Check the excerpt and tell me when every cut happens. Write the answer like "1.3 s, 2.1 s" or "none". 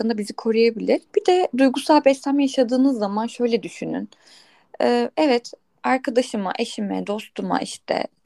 1.1 s